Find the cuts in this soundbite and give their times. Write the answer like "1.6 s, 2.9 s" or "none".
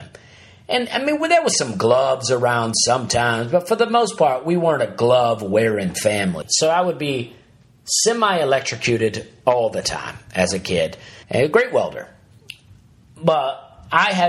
6.4 s, 11.2 s